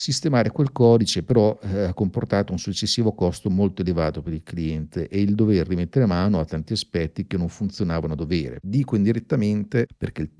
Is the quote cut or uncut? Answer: cut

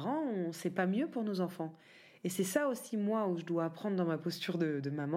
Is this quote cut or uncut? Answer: uncut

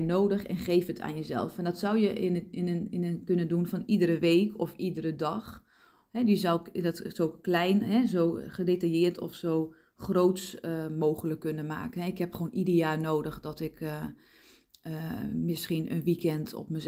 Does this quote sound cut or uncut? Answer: uncut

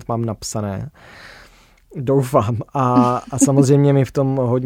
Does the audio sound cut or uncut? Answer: uncut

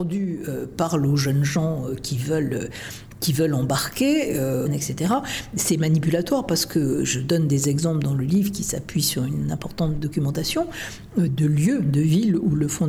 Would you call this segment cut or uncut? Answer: cut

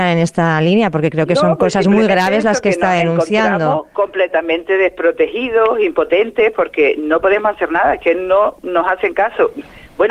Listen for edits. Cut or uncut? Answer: uncut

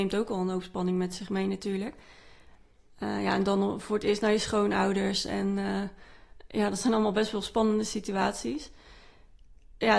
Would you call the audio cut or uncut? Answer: uncut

